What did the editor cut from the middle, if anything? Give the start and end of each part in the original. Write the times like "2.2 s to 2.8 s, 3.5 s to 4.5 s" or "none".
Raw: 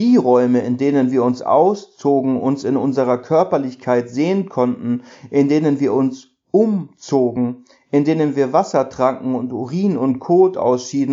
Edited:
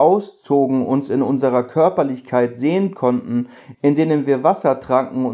5.3 s to 7.8 s